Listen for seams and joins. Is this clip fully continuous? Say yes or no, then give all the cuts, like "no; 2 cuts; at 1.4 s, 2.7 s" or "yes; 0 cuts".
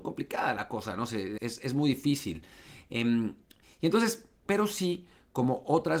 no; 2 cuts; at 1.4 s, 4.5 s